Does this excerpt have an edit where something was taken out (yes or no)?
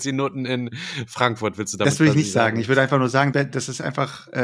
yes